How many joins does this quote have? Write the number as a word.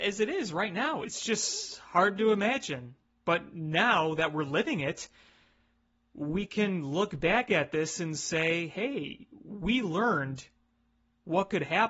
zero